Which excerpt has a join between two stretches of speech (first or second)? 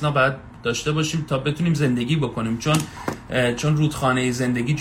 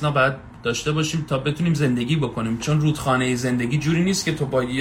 second